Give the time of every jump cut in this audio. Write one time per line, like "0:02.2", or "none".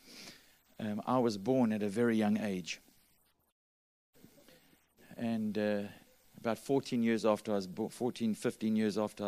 none